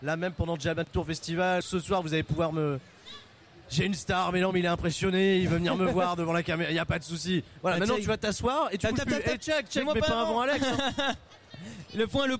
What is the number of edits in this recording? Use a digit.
2